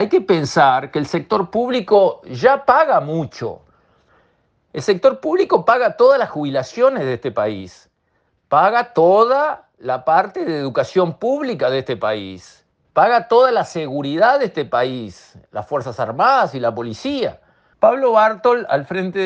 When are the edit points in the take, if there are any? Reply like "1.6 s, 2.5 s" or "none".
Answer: 8.4 s, 12.8 s, 17.7 s